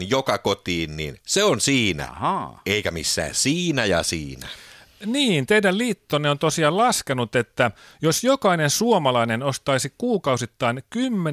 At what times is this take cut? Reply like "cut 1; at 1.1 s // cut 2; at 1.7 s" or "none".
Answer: none